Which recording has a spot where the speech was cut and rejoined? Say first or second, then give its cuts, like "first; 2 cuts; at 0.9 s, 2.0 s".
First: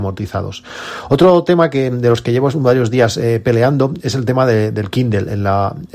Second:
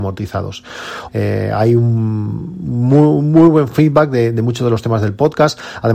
second; 1 cut; at 1.1 s